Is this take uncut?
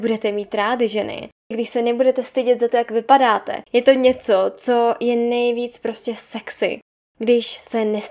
no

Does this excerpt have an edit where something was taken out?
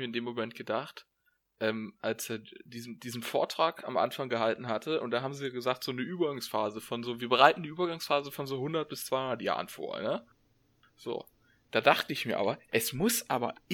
no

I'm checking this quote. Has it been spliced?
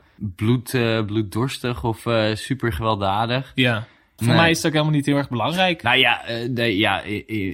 yes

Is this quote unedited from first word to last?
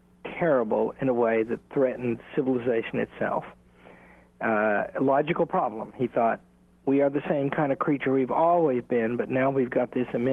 yes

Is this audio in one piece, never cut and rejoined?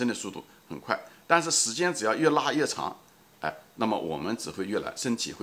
yes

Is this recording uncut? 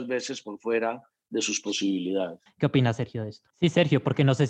no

